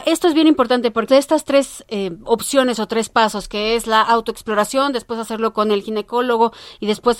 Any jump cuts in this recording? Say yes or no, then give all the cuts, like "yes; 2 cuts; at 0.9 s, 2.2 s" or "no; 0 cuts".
yes; 1 cut; at 1.1 s